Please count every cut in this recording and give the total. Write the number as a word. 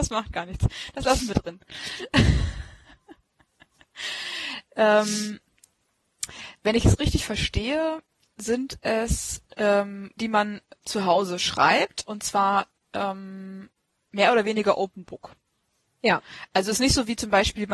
one